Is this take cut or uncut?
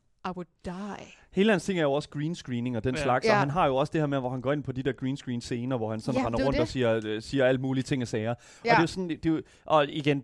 uncut